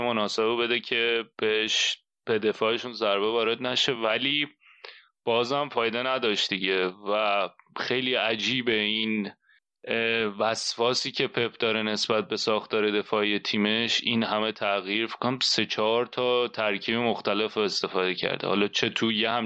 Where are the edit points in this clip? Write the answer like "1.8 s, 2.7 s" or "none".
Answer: 1.3 s